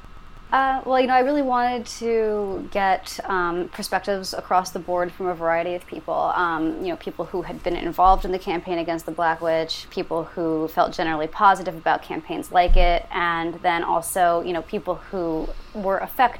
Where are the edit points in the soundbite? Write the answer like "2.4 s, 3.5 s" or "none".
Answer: none